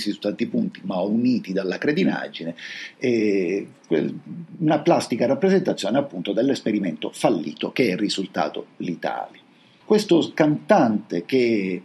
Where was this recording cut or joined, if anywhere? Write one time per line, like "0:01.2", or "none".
0:09.8

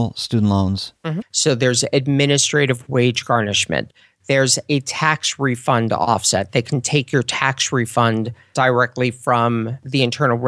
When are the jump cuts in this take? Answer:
0:01.2

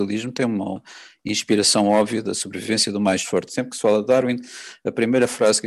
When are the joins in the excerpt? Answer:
0:03.5

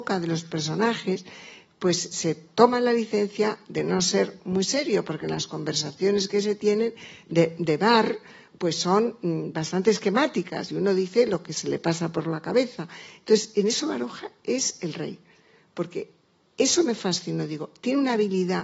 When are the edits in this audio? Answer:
none

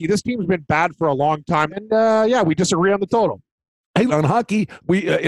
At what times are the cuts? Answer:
0:01.7
0:04.1

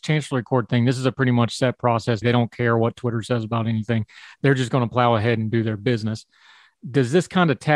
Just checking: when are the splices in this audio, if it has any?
0:02.2

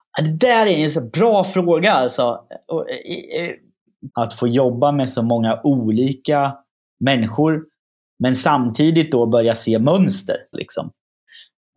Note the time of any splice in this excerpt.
0:04.1
0:10.5

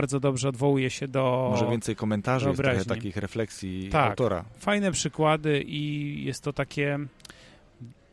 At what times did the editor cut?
none

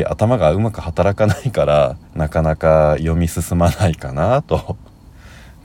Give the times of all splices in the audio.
0:02.1

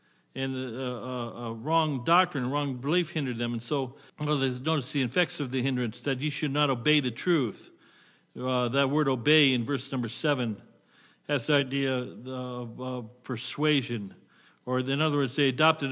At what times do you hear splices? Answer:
0:04.1

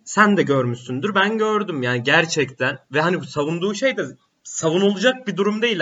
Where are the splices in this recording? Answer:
none

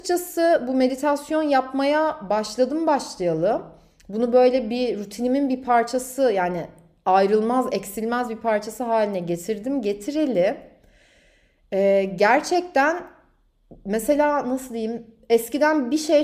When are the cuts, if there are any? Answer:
none

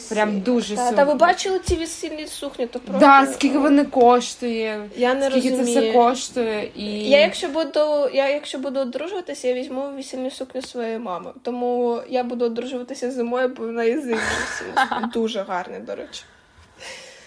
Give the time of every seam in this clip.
none

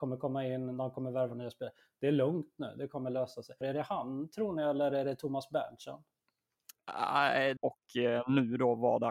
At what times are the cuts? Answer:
0:03.6
0:07.6

